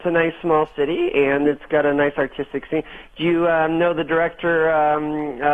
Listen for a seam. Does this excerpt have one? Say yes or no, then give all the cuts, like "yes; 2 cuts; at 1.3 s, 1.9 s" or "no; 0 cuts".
no; 0 cuts